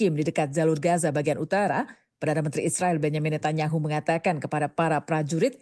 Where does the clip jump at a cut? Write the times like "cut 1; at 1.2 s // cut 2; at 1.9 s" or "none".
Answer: none